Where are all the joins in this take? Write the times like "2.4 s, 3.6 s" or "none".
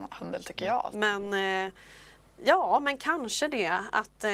0.9 s